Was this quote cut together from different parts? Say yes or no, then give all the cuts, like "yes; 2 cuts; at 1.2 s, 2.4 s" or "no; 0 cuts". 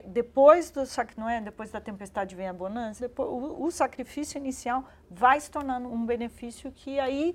yes; 2 cuts; at 3.0 s, 5.9 s